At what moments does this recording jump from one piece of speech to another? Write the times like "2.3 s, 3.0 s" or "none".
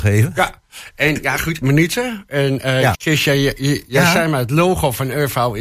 1.6 s, 2.9 s